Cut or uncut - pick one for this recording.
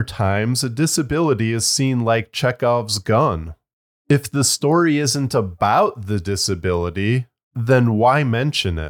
uncut